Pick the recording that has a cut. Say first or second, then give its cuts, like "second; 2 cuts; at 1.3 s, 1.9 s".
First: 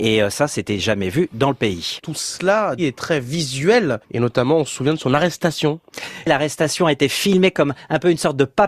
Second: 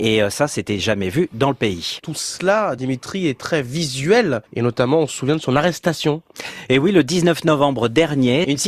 first; 2 cuts; at 2.8 s, 6.2 s